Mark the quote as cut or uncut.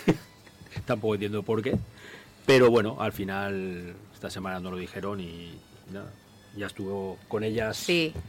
uncut